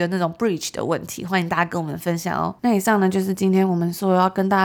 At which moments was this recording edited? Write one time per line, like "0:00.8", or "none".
0:02.6